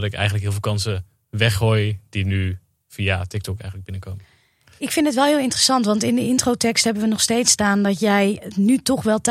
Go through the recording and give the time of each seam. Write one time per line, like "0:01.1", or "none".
none